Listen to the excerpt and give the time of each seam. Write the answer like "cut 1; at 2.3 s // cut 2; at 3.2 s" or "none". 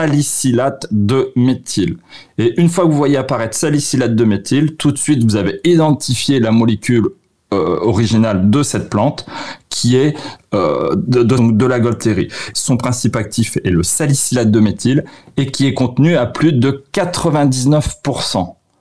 cut 1; at 11.4 s // cut 2; at 12.5 s